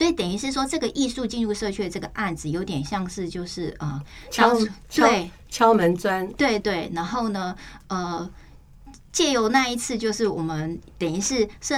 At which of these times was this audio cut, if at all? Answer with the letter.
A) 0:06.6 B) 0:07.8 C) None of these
A